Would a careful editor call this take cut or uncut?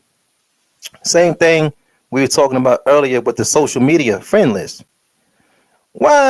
uncut